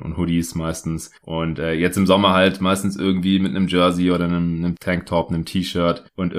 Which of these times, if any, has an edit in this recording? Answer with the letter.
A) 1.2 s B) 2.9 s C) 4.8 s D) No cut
A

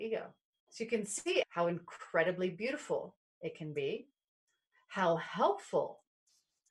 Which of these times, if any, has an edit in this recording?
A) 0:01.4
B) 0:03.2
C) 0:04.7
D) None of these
A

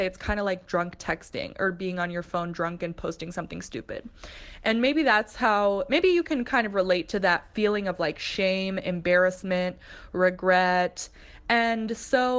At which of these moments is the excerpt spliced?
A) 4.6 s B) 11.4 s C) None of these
C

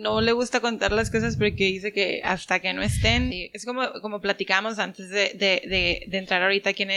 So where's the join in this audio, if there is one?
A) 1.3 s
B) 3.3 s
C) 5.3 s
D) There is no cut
B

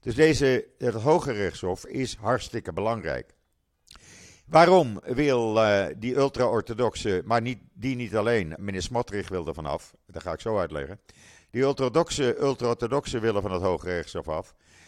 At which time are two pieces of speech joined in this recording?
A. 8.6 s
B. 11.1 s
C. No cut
A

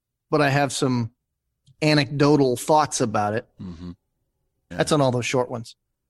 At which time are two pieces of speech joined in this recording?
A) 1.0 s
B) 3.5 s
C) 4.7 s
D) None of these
C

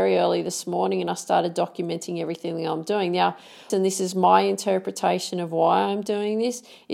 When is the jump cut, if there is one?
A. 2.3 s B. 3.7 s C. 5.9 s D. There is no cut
B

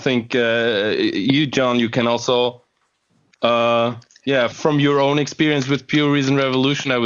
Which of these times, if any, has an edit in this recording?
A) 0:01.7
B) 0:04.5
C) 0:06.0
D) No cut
B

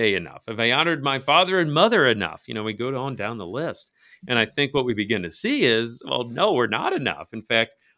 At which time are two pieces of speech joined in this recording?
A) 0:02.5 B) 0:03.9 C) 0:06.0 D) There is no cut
D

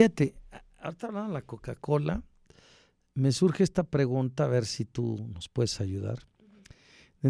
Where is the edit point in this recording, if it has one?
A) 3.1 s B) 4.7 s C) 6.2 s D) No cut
D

